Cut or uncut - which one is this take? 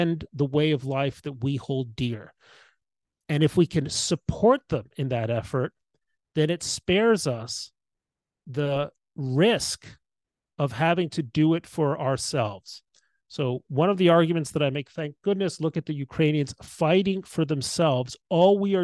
uncut